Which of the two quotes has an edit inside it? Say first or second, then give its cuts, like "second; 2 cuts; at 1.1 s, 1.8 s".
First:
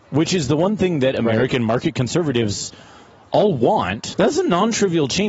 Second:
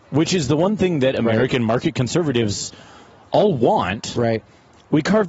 first; 1 cut; at 4.1 s